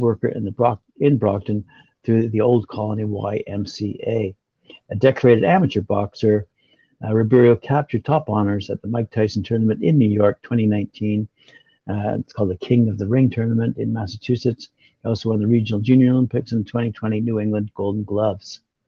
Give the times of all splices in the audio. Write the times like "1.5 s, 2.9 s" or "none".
none